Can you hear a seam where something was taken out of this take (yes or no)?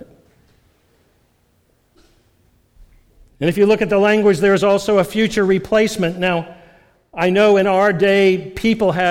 no